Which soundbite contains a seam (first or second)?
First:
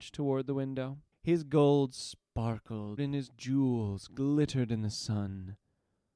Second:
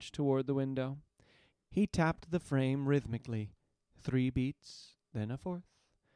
first